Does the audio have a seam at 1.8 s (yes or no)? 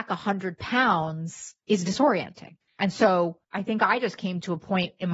yes